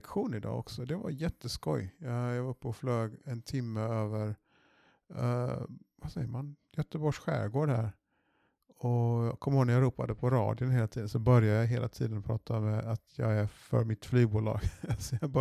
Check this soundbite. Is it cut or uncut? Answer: uncut